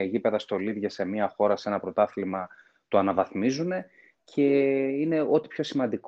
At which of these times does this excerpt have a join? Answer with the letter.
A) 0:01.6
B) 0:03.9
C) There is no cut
C